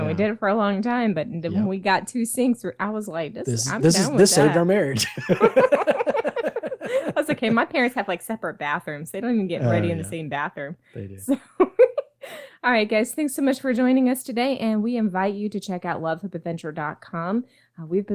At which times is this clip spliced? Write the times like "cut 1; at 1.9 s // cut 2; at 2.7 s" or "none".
none